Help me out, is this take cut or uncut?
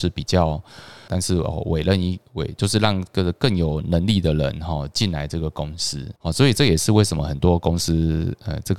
cut